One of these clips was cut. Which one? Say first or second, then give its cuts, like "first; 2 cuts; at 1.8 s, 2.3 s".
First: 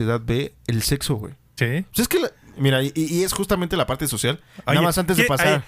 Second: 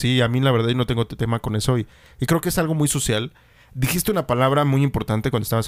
first; 1 cut; at 1.6 s